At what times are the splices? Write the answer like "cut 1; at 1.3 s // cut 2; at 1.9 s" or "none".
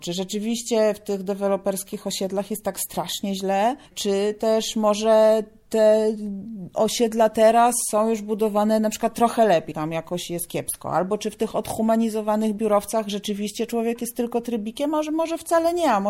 cut 1; at 3.9 s // cut 2; at 9.7 s